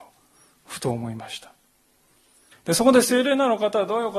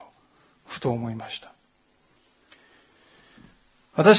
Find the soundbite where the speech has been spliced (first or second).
first